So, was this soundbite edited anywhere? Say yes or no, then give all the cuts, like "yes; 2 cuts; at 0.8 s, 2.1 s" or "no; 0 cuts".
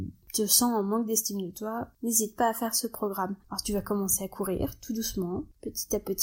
yes; 1 cut; at 3.4 s